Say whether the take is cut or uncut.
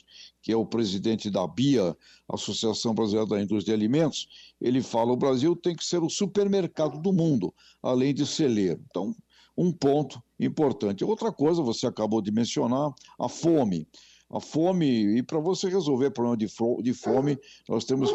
uncut